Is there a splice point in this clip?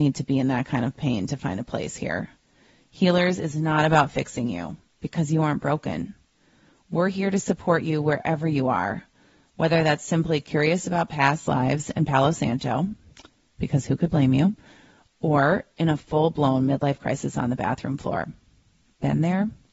no; 0 cuts

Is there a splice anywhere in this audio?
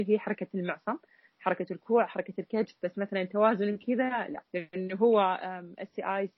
yes; 1 cut; at 4.5 s

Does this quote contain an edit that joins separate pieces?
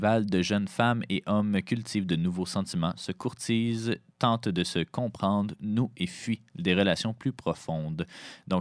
no; 0 cuts

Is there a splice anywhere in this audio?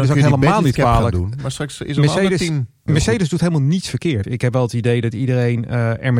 yes; 1 cut; at 4.2 s

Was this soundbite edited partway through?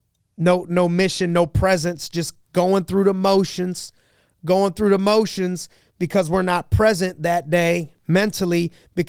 no; 0 cuts

